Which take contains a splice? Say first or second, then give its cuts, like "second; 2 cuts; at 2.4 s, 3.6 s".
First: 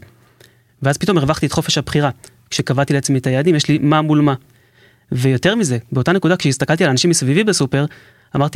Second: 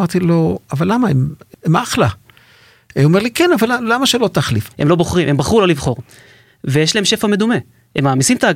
second; 2 cuts; at 1.5 s, 4.7 s